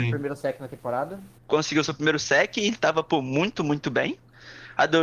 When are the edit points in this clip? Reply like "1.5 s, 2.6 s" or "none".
1.4 s